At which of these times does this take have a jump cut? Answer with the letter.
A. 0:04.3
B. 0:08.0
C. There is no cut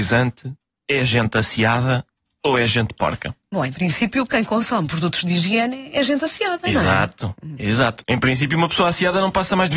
B